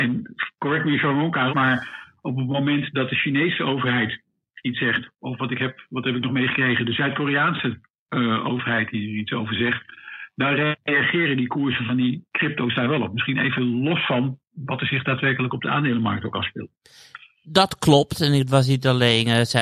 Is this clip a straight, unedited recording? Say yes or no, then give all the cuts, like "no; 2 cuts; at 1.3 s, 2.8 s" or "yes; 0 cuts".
no; 1 cut; at 1.5 s